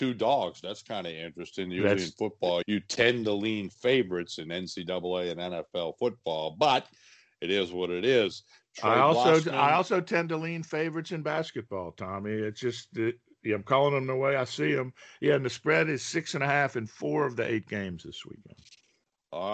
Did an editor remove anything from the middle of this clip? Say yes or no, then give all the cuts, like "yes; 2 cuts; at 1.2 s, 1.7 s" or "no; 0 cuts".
yes; 1 cut; at 2.6 s